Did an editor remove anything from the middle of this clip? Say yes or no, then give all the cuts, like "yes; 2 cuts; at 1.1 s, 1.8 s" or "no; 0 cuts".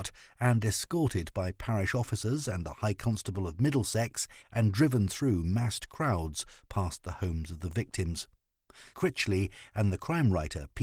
yes; 2 cuts; at 4.4 s, 8.9 s